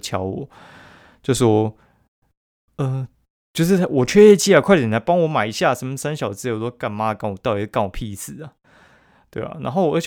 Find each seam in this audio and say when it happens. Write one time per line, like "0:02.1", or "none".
none